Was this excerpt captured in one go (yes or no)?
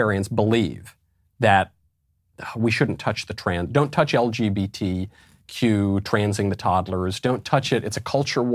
yes